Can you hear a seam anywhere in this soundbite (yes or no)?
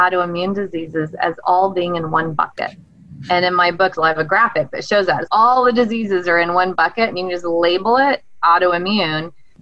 yes